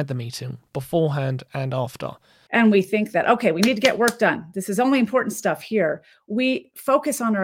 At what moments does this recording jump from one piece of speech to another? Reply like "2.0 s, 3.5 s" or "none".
2.5 s